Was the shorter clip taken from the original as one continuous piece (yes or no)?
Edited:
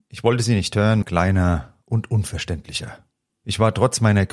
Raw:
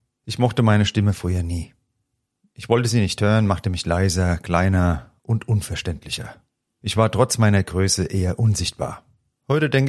no